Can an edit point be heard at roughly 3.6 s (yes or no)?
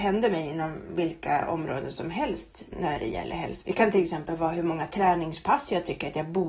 yes